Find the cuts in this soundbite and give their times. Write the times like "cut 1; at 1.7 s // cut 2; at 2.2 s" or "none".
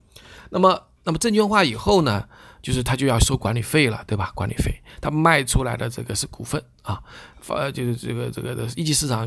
none